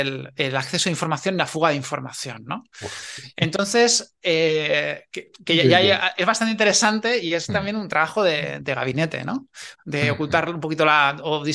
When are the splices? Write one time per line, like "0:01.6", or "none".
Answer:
0:09.7